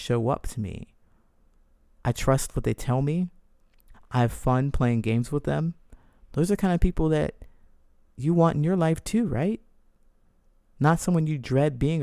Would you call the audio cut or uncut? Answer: cut